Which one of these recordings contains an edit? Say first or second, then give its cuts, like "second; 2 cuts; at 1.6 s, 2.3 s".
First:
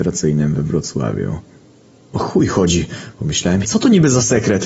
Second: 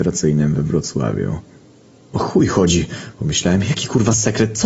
first; 1 cut; at 3.6 s